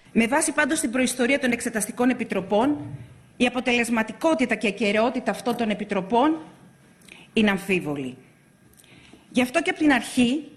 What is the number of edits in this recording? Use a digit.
0